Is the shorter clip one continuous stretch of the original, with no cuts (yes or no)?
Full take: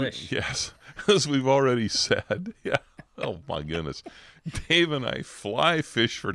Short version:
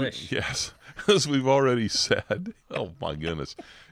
no